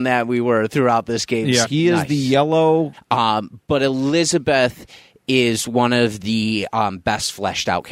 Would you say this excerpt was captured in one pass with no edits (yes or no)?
no